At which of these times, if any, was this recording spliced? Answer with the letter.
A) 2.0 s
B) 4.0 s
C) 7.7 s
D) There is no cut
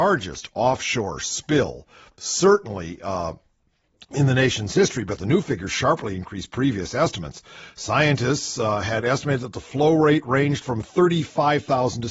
D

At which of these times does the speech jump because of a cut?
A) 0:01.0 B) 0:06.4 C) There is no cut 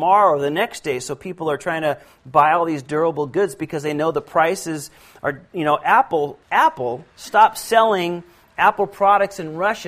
B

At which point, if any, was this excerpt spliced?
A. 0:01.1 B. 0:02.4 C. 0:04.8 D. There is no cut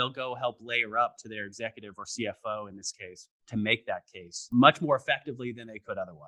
D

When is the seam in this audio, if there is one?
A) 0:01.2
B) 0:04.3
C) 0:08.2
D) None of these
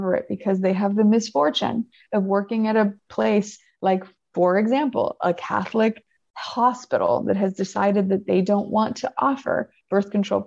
D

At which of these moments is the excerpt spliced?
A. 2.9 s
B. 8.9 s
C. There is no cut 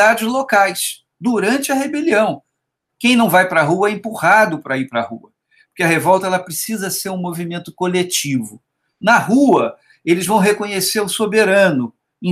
A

